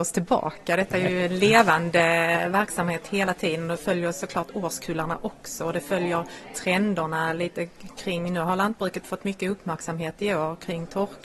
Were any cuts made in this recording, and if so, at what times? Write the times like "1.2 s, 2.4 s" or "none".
none